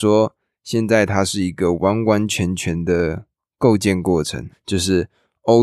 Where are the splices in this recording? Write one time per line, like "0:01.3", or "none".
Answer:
0:04.5